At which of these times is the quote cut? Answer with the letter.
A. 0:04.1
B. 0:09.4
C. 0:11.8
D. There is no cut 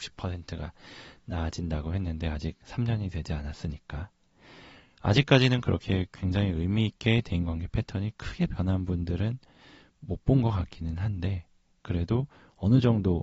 D